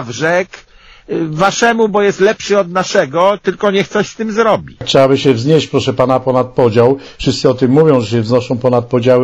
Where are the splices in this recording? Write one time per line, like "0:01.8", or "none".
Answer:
none